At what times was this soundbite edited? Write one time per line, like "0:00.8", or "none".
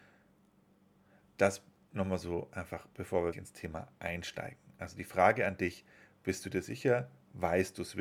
0:03.3